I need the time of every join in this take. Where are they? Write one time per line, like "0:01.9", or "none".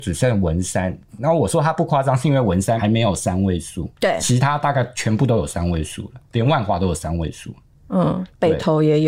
none